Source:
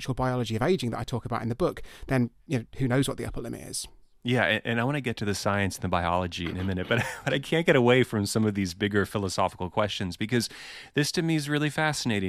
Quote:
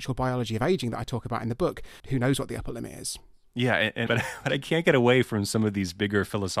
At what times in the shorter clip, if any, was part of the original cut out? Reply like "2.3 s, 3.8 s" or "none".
2.0 s, 4.1 s